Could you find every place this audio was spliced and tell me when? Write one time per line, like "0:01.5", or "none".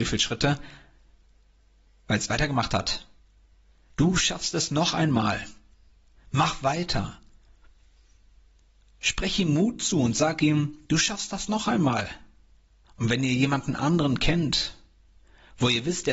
0:06.2
0:08.9
0:12.8